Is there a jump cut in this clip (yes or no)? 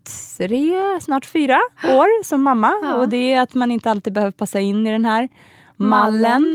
no